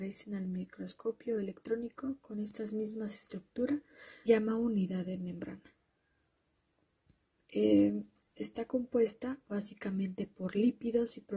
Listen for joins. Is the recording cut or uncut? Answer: cut